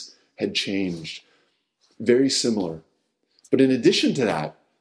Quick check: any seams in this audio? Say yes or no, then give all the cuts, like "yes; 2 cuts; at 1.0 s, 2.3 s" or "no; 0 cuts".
no; 0 cuts